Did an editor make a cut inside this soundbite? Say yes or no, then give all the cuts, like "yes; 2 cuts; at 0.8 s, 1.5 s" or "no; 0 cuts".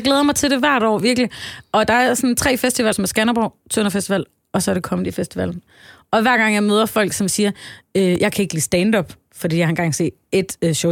yes; 1 cut; at 2.9 s